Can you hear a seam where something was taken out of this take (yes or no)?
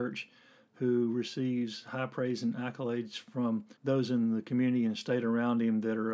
yes